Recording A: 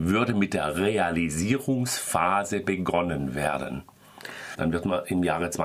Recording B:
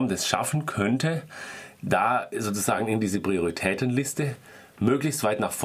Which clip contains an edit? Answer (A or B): A